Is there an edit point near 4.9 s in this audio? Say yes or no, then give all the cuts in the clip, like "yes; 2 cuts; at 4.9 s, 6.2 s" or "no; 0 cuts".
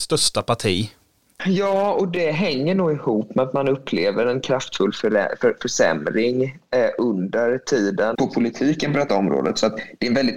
no; 2 cuts; at 1.4 s, 8.1 s